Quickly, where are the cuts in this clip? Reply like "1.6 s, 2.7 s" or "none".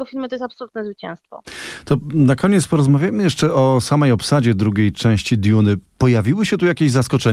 none

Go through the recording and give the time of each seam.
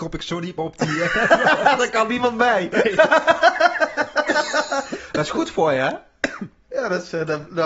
none

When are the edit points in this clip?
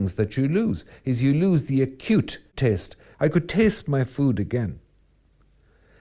3.1 s

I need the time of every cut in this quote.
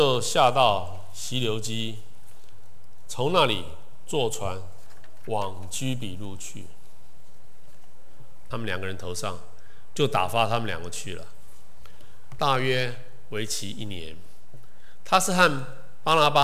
8.5 s, 12.4 s

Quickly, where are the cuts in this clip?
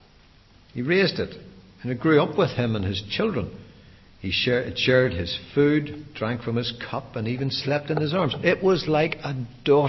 none

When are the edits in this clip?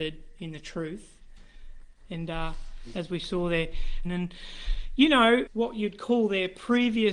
4.0 s, 5.5 s

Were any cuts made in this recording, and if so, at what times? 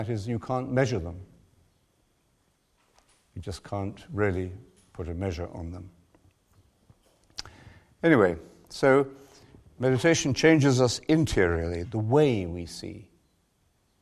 11.8 s

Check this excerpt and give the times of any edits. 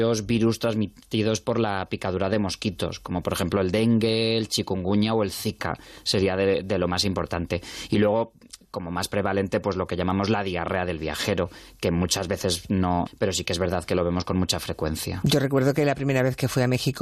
13.1 s

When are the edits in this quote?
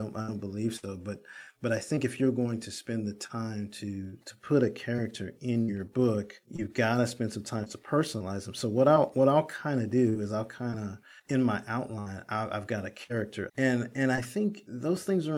13.5 s

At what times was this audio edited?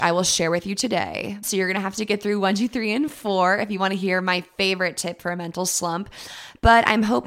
1.4 s

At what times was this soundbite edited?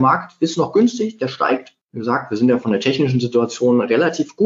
1.8 s

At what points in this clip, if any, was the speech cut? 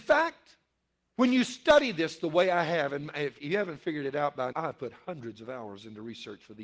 4.5 s

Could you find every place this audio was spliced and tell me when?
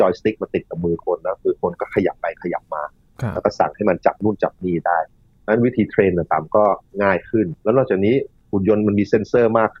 7.6 s

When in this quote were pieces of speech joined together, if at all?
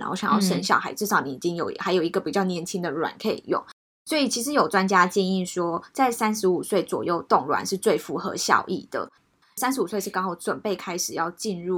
none

